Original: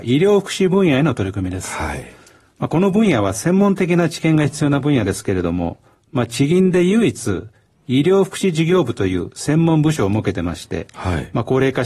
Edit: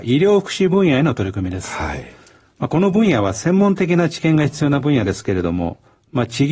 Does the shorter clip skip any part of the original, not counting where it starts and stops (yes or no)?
no